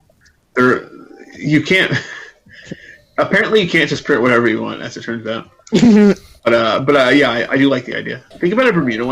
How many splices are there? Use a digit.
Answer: 0